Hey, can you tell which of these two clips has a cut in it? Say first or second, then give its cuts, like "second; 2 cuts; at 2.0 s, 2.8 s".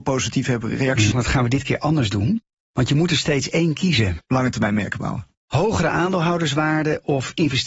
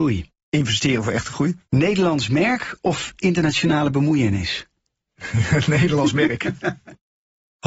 first; 2 cuts; at 1.1 s, 4.2 s